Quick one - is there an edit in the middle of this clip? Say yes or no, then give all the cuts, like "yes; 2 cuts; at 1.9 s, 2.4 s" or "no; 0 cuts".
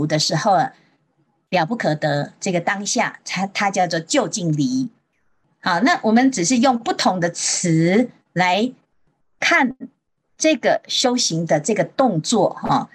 no; 0 cuts